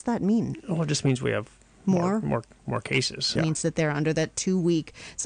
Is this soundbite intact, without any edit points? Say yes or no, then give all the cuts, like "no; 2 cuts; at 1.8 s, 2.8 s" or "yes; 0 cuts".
no; 1 cut; at 3.4 s